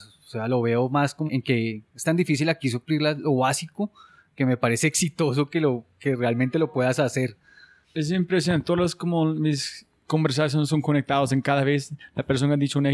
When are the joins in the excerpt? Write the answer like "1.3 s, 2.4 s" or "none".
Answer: 1.3 s